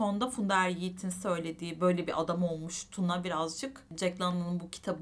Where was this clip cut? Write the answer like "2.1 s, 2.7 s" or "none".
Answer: none